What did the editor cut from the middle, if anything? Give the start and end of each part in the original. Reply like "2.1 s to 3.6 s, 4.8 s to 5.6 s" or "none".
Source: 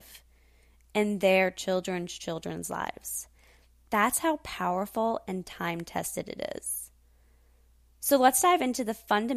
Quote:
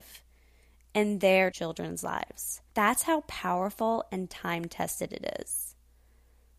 1.5 s to 2.2 s, 3.4 s to 3.9 s